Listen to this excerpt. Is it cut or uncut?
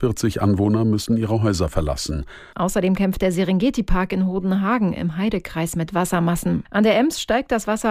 cut